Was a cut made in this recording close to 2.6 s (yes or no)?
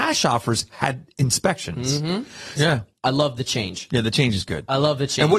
yes